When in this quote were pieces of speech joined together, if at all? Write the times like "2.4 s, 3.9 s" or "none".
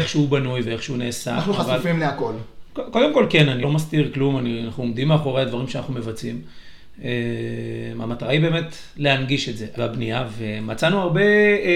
3.6 s, 9.8 s